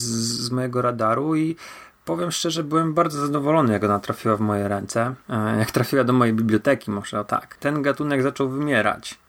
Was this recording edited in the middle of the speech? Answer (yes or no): yes